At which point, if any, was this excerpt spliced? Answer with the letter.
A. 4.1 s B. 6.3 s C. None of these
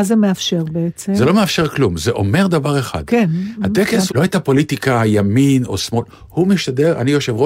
A